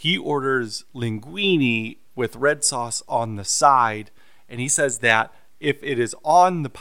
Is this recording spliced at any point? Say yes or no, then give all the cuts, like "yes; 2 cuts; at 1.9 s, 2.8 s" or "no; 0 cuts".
no; 0 cuts